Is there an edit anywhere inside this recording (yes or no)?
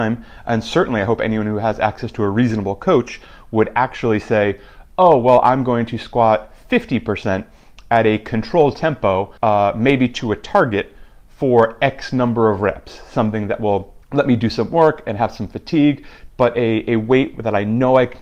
yes